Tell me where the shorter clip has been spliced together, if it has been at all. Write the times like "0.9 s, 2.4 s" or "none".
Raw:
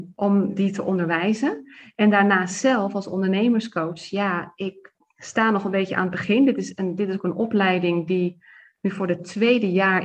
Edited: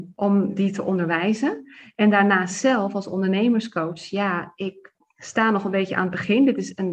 none